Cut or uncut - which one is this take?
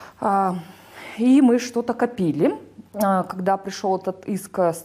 cut